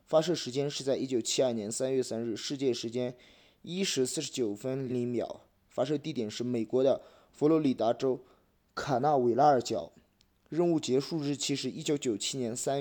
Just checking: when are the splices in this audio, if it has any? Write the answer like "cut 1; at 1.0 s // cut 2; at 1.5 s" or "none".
cut 1; at 4.9 s